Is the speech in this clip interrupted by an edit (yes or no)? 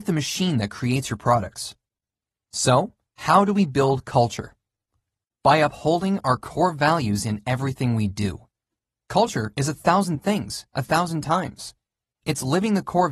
no